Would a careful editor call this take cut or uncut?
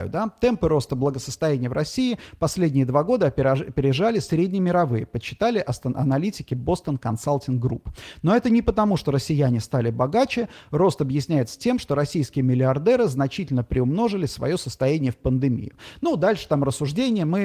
uncut